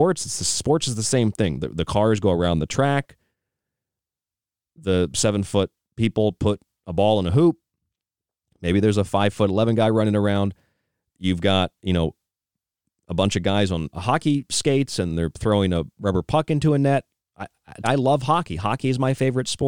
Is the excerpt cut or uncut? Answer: cut